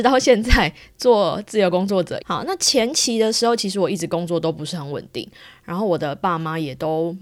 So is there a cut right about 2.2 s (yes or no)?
yes